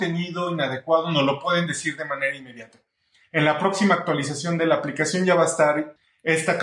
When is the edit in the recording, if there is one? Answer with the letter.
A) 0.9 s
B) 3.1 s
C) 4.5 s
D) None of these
D